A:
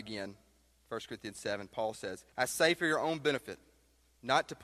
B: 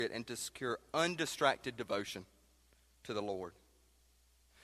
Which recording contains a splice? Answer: A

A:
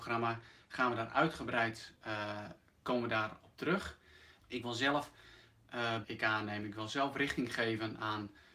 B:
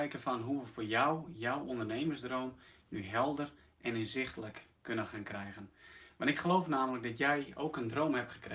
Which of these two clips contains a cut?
A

